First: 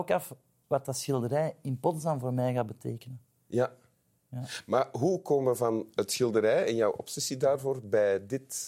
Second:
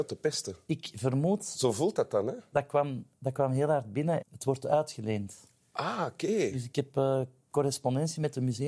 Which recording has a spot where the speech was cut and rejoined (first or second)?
second